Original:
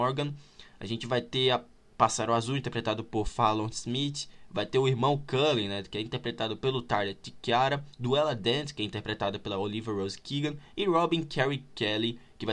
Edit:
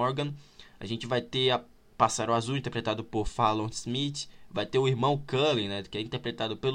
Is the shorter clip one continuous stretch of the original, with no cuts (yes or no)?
yes